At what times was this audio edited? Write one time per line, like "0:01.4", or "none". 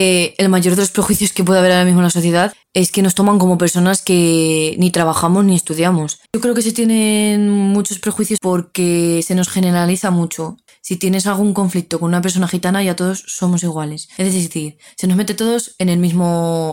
0:02.6
0:06.3